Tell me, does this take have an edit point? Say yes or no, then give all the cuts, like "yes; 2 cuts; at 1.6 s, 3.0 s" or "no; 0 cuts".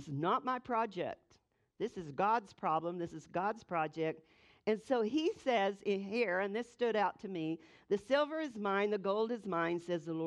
no; 0 cuts